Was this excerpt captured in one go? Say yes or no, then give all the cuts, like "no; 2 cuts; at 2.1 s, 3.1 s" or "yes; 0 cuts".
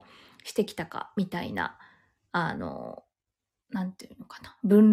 yes; 0 cuts